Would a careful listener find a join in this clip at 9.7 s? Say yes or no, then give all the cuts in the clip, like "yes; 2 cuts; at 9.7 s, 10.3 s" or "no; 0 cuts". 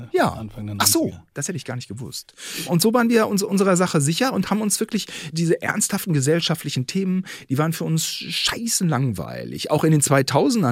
no; 1 cut; at 5.3 s